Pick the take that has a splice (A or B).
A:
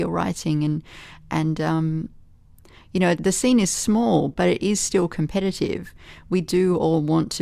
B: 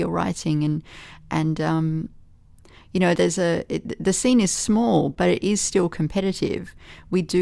A